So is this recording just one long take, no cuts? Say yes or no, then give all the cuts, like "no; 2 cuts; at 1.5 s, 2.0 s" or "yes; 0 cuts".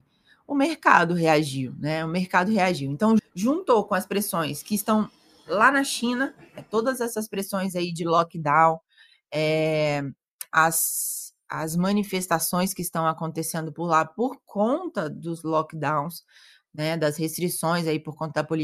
no; 1 cut; at 3.2 s